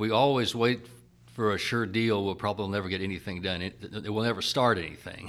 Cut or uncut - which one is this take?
uncut